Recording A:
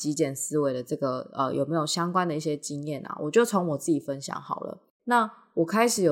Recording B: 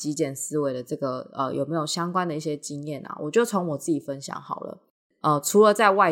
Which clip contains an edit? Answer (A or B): A